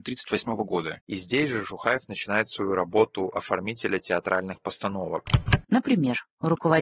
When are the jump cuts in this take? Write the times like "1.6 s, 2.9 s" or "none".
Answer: 1.0 s, 5.6 s